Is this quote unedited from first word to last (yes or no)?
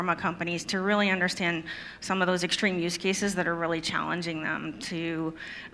yes